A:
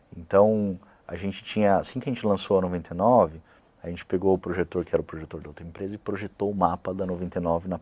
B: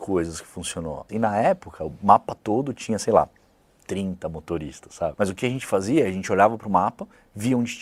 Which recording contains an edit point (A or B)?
B